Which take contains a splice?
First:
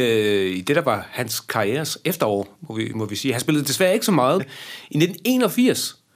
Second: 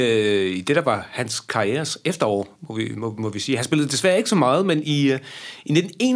first; 2 cuts; at 2.9 s, 4.4 s

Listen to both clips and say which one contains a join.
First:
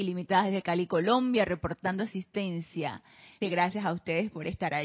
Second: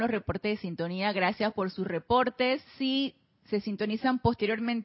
first; 1 cut; at 3.4 s

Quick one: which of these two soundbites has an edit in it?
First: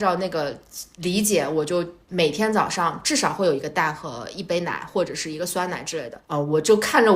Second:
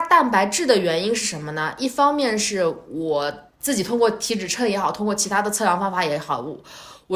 first; 1 cut; at 6.2 s

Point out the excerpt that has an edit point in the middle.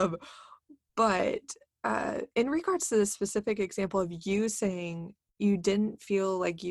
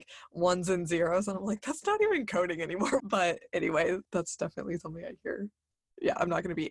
second; 2 cuts; at 3.0 s, 4.0 s

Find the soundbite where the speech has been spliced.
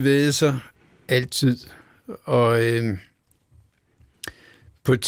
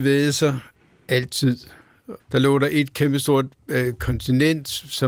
second; 1 cut; at 2.2 s

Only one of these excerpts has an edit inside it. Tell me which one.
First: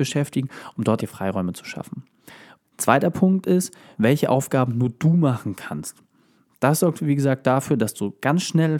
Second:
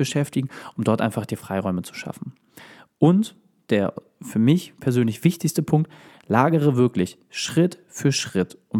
first; 3 cuts; at 1.0 s, 2.6 s, 3.9 s

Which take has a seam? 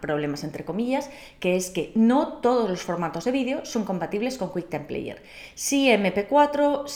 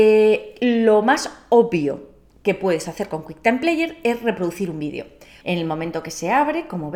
second; 1 cut; at 5.4 s

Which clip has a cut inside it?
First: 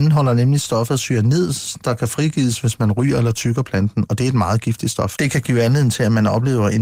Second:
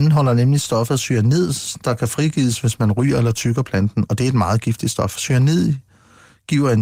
first; 1 cut; at 5.1 s

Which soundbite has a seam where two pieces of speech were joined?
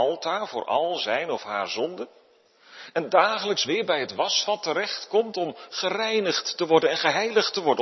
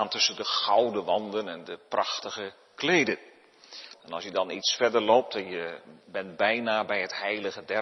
second; 1 cut; at 3.9 s

